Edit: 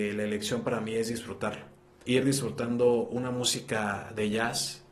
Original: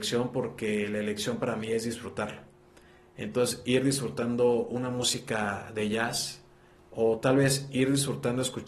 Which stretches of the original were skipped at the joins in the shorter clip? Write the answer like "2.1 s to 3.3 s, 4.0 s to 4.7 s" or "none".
2.8 s to 3.6 s